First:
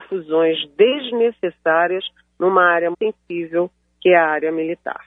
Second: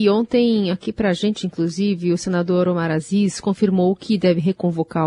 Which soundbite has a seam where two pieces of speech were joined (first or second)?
first